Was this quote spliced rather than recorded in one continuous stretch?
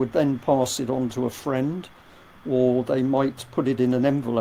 no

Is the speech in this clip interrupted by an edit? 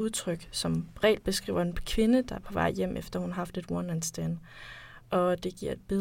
no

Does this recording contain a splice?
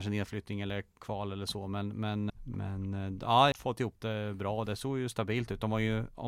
yes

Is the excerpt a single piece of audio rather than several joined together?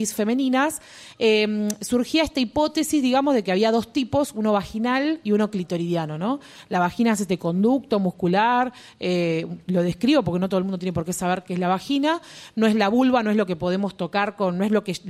yes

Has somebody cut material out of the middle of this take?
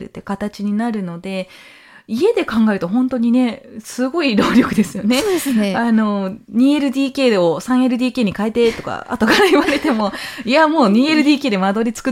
no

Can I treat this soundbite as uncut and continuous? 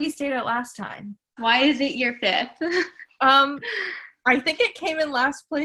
no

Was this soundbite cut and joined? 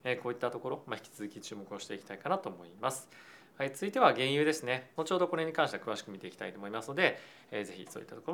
yes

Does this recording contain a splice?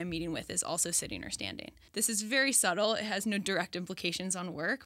yes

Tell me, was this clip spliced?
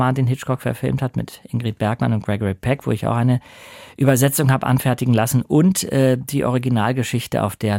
no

